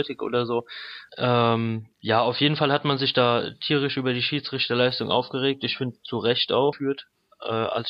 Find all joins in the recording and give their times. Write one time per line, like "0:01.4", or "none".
0:01.1
0:06.7